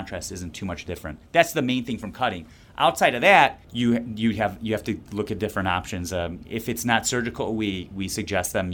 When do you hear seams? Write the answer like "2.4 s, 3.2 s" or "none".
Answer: 3.6 s